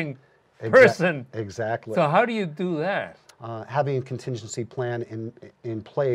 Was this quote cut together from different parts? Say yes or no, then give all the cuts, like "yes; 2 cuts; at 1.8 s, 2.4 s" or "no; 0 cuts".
yes; 1 cut; at 3.3 s